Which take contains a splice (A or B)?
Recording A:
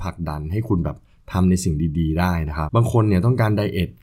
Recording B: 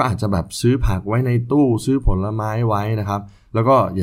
A